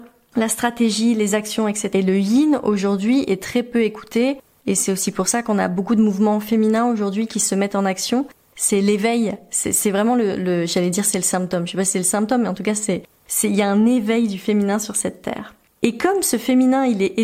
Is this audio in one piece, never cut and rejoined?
no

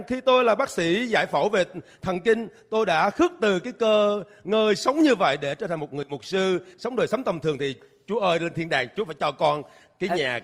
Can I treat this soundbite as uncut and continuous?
yes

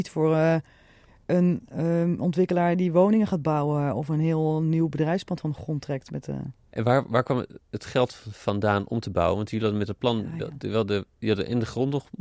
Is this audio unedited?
yes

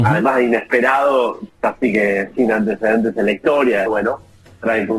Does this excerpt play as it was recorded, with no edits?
no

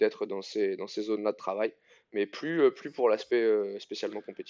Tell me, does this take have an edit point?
no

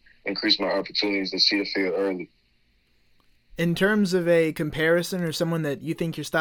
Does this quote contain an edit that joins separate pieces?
no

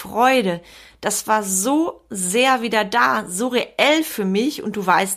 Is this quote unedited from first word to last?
yes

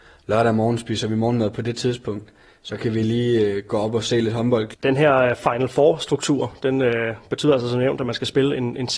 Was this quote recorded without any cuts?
no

